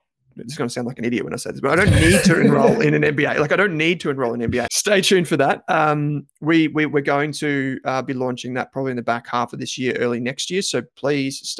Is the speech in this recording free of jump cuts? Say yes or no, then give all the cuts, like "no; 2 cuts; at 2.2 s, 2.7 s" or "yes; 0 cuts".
no; 1 cut; at 4.7 s